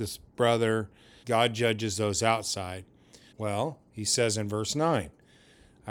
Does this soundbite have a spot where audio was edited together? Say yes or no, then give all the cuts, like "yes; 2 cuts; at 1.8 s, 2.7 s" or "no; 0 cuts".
yes; 2 cuts; at 1.2 s, 3.3 s